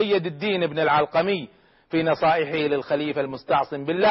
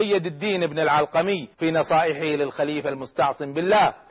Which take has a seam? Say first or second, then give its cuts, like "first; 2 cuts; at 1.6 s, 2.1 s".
second; 1 cut; at 1.5 s